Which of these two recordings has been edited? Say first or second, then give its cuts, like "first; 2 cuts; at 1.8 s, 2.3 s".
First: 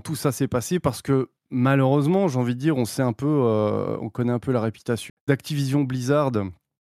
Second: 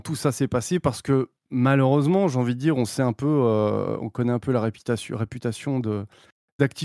first; 1 cut; at 5.1 s